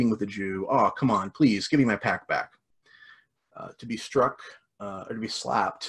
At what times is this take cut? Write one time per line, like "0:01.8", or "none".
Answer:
0:03.3